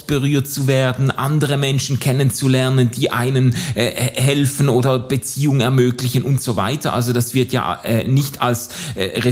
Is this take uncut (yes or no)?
yes